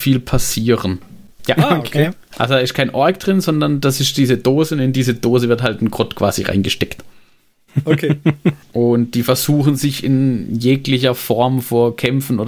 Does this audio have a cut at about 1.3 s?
yes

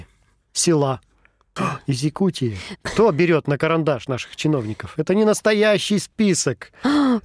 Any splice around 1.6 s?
yes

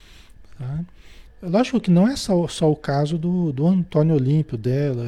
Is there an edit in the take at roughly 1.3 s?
yes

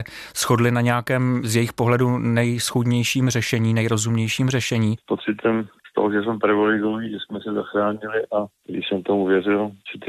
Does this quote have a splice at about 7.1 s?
no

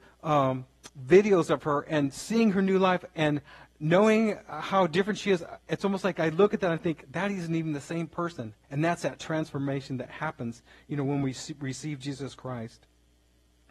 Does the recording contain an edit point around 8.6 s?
yes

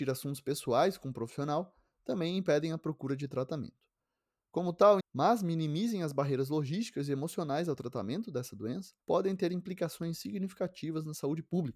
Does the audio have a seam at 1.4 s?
no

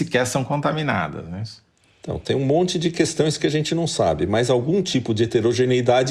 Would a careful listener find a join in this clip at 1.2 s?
no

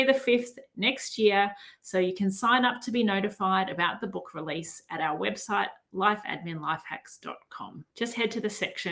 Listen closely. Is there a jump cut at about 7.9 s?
yes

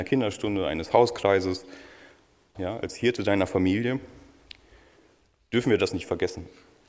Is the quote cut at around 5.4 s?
no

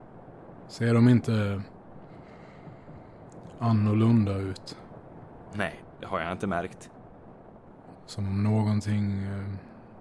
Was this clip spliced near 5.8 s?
yes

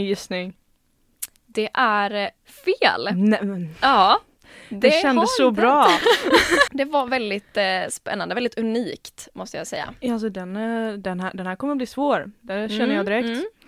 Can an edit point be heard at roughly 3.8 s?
no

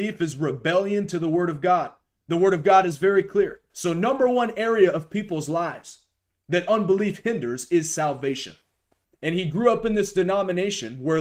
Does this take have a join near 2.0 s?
no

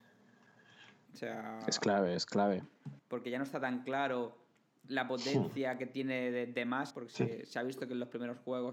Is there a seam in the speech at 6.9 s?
yes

